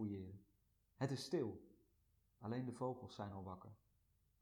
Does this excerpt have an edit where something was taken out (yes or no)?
no